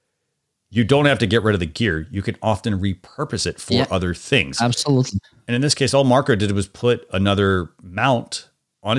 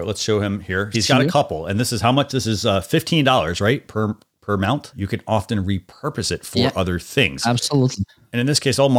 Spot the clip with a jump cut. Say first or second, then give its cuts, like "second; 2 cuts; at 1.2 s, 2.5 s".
second; 2 cuts; at 0.9 s, 4.9 s